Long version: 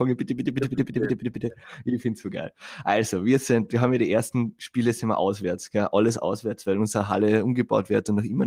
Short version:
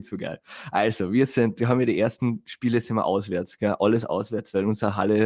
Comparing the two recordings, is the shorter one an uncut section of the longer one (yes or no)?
yes